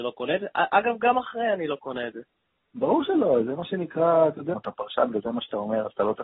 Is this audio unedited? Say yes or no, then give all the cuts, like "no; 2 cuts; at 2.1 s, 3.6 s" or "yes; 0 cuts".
no; 2 cuts; at 3.4 s, 4.5 s